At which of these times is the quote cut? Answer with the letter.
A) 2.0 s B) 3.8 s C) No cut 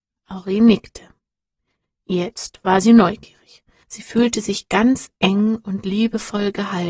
B